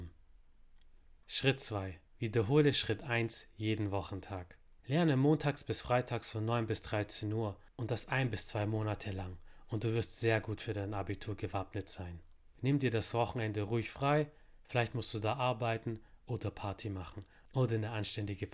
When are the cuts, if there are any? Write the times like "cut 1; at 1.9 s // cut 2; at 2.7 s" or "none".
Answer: cut 1; at 2.1 s // cut 2; at 4.8 s // cut 3; at 7.7 s